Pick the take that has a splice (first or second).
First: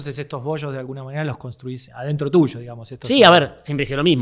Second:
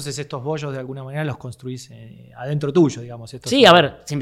first